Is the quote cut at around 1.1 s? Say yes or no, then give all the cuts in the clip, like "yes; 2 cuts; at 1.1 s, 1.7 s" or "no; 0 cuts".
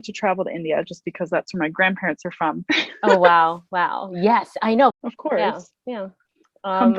no; 2 cuts; at 2.7 s, 4.9 s